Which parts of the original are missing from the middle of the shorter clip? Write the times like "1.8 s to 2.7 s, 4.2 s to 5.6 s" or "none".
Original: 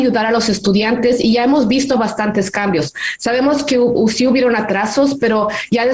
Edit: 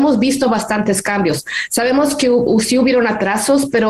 none